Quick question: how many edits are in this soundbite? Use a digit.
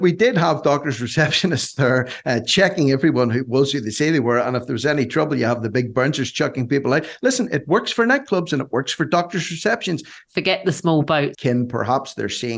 2